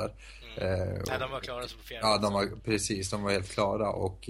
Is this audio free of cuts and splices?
yes; 0 cuts

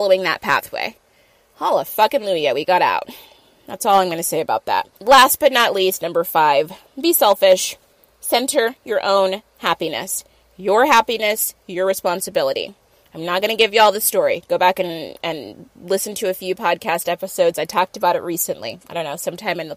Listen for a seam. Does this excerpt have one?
no; 0 cuts

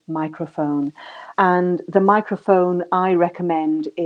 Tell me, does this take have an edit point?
no; 0 cuts

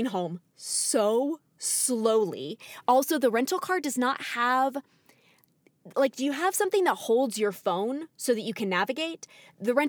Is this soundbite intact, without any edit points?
yes; 0 cuts

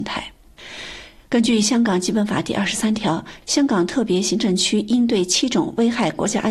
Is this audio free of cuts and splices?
yes; 0 cuts

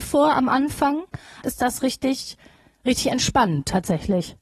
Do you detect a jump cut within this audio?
yes; 1 cut; at 1.4 s

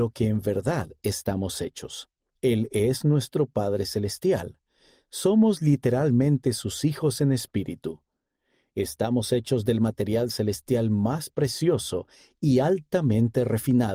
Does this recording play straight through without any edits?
no; 1 cut; at 2.3 s

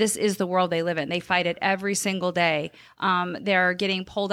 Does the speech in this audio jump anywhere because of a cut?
yes; 1 cut; at 2.9 s

